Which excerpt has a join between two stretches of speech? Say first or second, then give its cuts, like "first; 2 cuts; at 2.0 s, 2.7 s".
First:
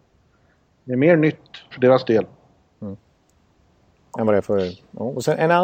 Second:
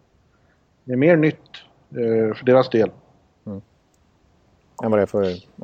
first; 1 cut; at 1.7 s